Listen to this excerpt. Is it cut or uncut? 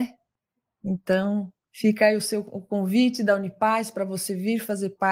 cut